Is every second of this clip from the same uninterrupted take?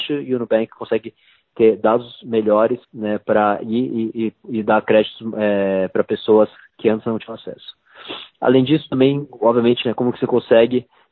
no; 2 cuts; at 2.8 s, 9.8 s

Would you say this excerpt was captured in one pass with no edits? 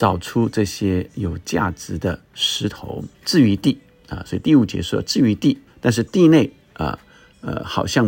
no; 2 cuts; at 3.1 s, 5.7 s

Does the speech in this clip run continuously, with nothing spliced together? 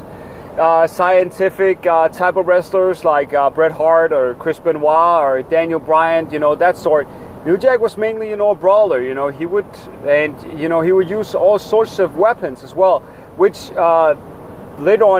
yes; 0 cuts

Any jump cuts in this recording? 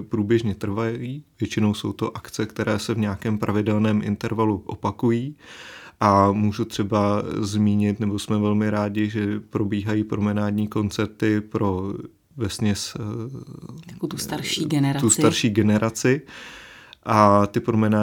no; 0 cuts

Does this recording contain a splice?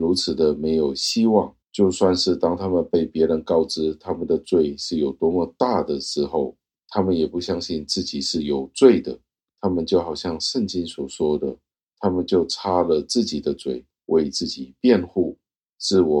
yes; 1 cut; at 1.6 s

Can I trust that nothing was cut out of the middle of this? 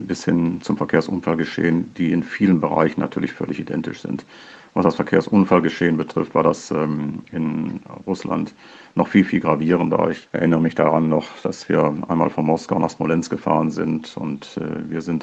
yes; 0 cuts

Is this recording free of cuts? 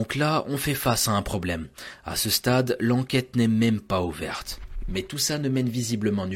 no; 1 cut; at 4.8 s

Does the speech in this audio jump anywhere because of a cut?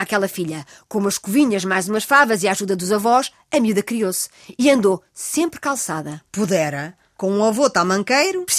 no; 0 cuts

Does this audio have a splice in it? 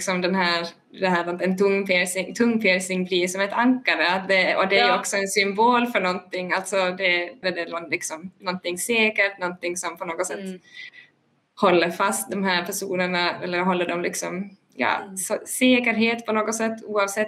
yes; 1 cut; at 7.4 s

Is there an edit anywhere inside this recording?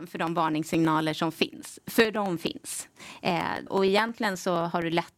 yes; 1 cut; at 3.7 s

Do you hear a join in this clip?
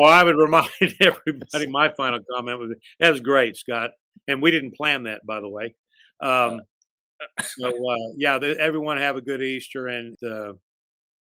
yes; 1 cut; at 10.1 s

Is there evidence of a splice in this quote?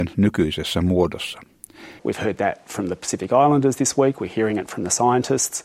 yes; 1 cut; at 2.0 s

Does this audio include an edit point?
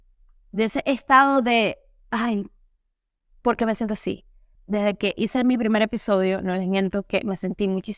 yes; 1 cut; at 4.5 s

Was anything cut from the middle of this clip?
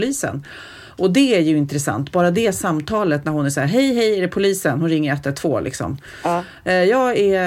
no; 0 cuts

